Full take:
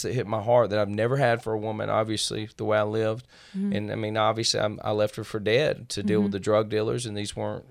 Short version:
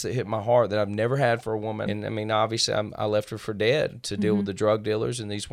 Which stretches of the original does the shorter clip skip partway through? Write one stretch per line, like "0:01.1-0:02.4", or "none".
0:01.9-0:03.7